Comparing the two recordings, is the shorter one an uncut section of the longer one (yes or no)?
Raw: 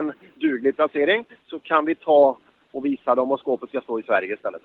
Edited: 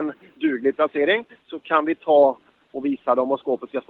yes